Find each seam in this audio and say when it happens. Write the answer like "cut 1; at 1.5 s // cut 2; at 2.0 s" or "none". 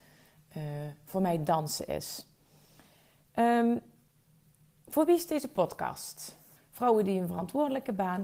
cut 1; at 6.6 s